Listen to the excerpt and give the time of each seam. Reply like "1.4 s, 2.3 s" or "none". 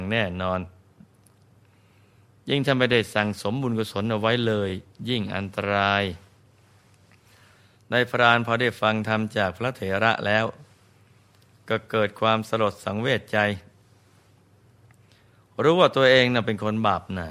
none